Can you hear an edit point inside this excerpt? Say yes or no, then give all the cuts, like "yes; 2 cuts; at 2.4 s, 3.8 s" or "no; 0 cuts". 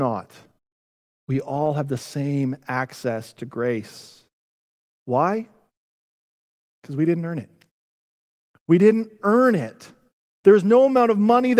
no; 0 cuts